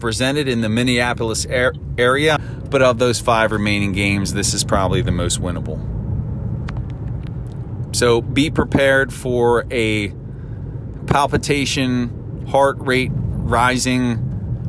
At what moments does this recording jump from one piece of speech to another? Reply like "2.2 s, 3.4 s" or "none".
2.4 s